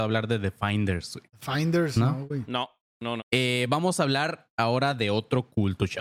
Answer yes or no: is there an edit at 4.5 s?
no